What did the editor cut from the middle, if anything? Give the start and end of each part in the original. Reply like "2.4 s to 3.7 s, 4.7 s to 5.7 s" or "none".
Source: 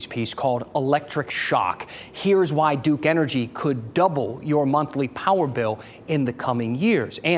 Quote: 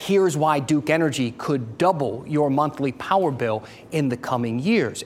none